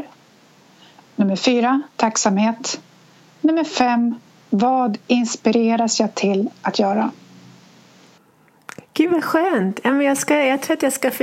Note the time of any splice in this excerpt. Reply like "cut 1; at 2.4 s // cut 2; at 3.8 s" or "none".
none